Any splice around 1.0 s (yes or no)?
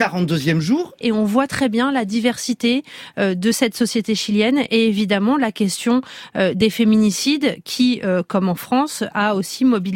yes